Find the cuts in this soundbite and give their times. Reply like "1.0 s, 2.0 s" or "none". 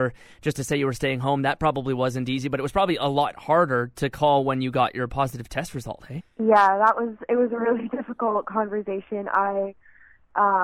6.2 s